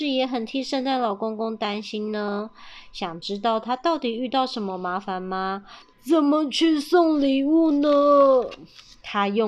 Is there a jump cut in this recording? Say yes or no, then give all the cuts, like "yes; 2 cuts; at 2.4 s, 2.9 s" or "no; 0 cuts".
yes; 1 cut; at 5.9 s